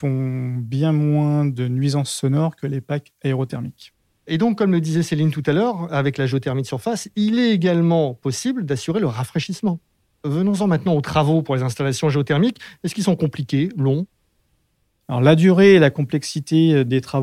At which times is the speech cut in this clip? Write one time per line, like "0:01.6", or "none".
0:10.0